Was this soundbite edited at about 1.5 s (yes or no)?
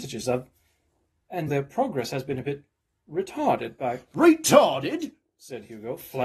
yes